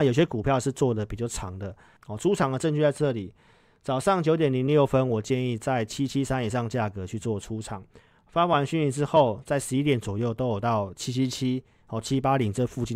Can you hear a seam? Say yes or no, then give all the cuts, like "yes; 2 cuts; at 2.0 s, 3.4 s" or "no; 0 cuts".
no; 0 cuts